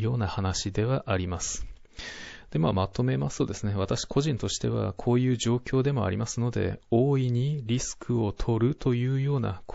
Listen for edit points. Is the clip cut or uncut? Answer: uncut